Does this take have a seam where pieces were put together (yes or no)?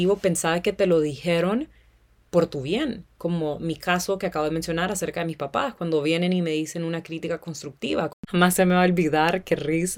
no